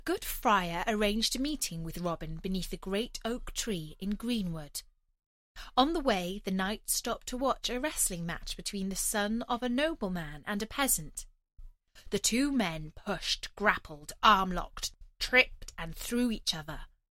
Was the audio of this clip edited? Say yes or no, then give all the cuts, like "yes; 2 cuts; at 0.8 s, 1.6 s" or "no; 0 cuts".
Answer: no; 0 cuts